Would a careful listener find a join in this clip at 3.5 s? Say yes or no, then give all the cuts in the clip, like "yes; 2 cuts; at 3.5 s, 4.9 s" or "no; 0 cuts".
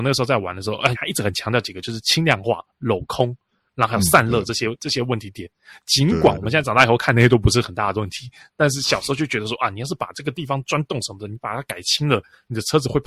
no; 1 cut; at 0.9 s